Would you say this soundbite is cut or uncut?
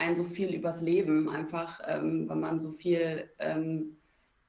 uncut